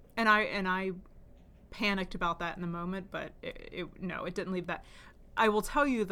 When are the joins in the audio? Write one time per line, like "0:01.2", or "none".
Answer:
none